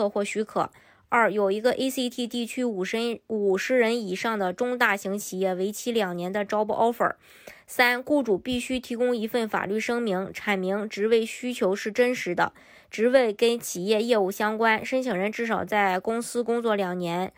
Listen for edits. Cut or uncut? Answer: uncut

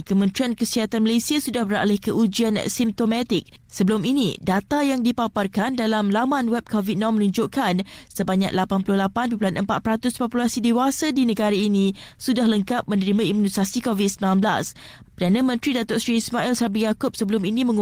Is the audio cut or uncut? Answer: cut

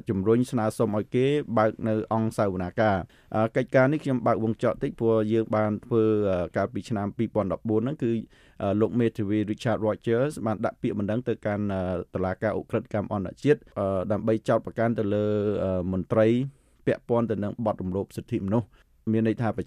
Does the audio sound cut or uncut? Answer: uncut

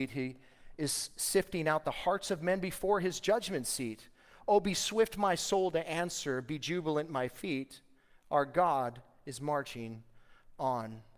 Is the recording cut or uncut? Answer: uncut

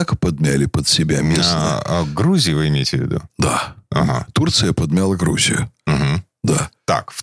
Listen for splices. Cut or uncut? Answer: uncut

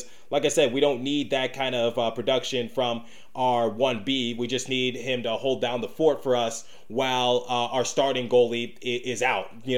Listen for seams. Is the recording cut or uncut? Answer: uncut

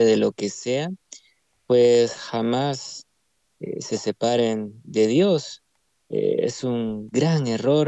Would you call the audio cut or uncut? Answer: uncut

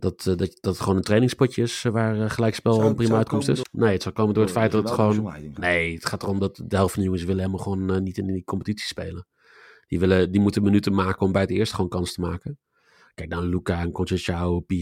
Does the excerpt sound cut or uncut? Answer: cut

